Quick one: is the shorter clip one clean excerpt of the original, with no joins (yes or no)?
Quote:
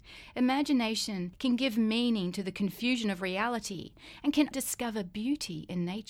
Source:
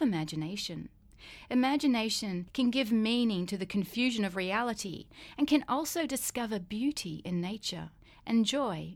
no